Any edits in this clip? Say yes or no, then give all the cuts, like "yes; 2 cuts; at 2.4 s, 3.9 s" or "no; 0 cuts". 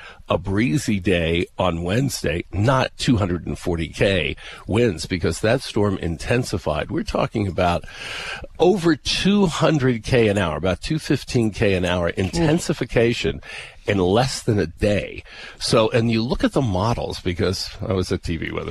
no; 0 cuts